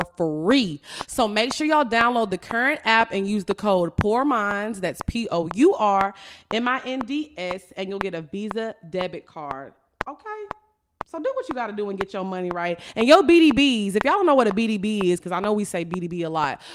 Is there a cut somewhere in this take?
yes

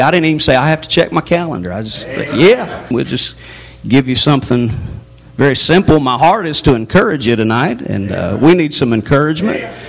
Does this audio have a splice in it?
yes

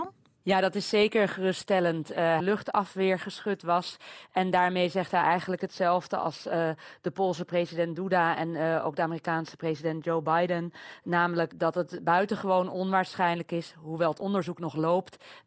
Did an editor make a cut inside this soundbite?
yes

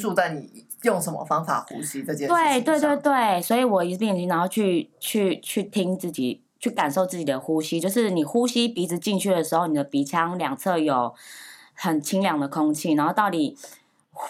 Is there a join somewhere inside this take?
no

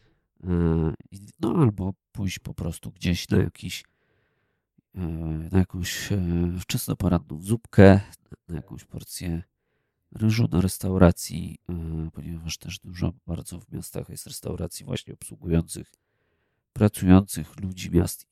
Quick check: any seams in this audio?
yes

